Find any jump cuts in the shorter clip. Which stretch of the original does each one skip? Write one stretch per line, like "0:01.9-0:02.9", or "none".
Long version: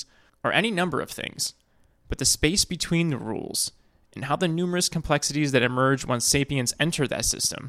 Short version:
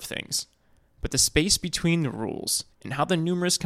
0:03.8-0:04.0